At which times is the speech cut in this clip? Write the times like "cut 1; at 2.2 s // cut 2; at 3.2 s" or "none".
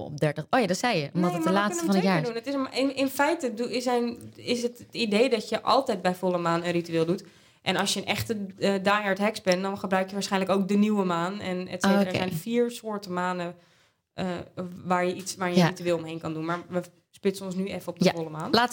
none